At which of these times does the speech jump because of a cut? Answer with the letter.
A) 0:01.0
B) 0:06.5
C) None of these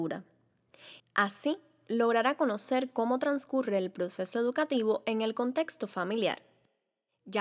A